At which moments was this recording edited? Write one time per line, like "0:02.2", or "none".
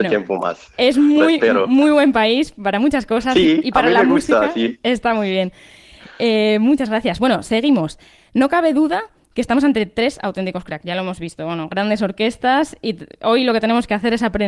none